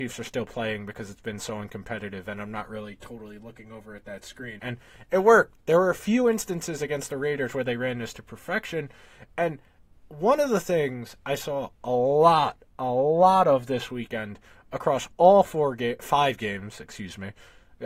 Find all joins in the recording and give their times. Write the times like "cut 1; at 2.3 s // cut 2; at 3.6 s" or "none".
cut 1; at 4.6 s

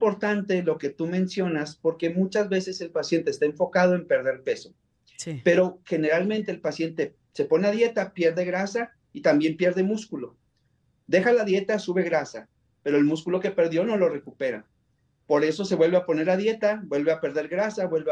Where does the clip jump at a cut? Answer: none

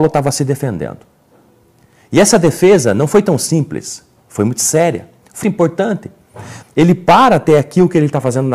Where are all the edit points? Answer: cut 1; at 5.4 s // cut 2; at 6.6 s

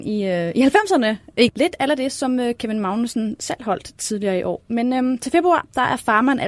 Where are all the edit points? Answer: cut 1; at 1.5 s

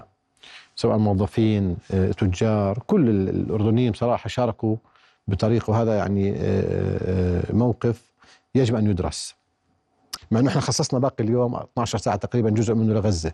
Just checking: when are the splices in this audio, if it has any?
cut 1; at 10.2 s

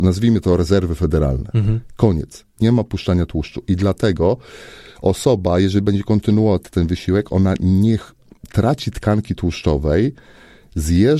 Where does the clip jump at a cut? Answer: none

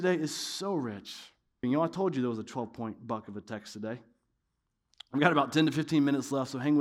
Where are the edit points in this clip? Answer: cut 1; at 1.6 s

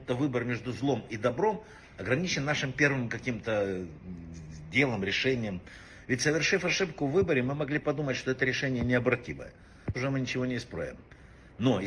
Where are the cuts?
cut 1; at 9.9 s

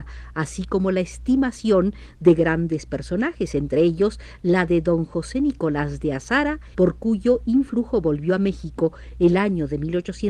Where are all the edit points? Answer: cut 1; at 6.7 s

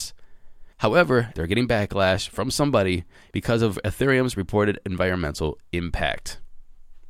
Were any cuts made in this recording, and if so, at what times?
cut 1; at 1.3 s

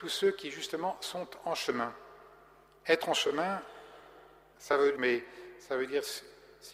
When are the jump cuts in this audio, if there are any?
cut 1; at 5.0 s

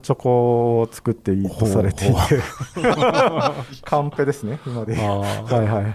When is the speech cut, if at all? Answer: none

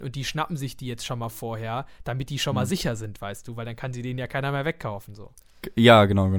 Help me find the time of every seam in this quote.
none

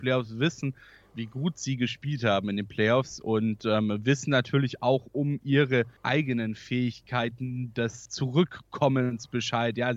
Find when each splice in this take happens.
cut 1; at 6.0 s // cut 2; at 8.1 s

